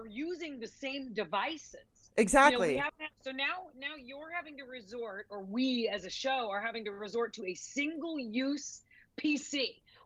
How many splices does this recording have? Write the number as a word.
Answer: one